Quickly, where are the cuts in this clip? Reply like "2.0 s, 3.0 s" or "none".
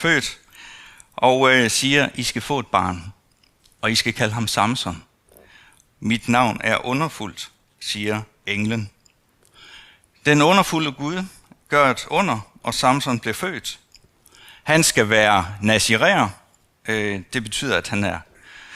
5.9 s